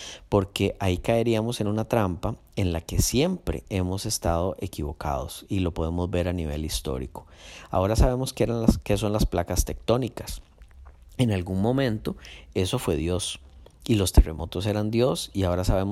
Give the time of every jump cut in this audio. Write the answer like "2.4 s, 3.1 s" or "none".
none